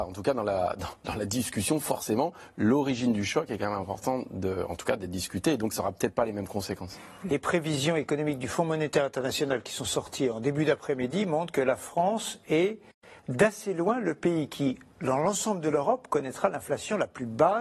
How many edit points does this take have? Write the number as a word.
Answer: zero